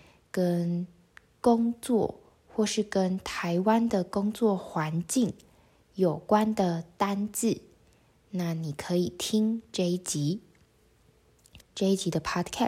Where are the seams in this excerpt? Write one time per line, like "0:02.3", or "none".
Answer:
0:11.6